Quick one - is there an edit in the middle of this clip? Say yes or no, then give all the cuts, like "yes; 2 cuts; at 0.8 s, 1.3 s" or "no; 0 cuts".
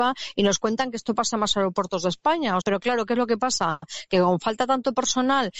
yes; 1 cut; at 2.6 s